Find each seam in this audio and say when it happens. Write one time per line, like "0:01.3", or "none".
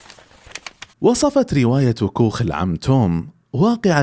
0:00.9